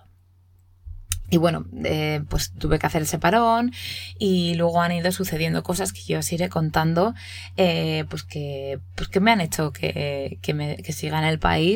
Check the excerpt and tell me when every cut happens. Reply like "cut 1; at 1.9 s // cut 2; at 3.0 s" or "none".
cut 1; at 1.2 s // cut 2; at 2.6 s